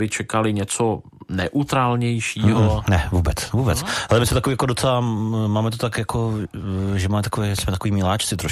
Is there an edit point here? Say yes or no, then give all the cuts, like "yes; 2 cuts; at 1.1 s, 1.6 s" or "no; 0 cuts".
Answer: no; 0 cuts